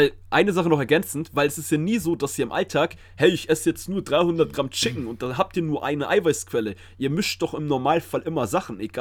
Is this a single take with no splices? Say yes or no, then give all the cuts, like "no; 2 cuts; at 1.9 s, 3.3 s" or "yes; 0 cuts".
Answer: yes; 0 cuts